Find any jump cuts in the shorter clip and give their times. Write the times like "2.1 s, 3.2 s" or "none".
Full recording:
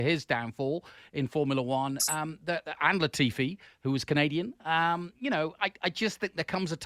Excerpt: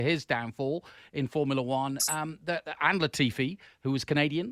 none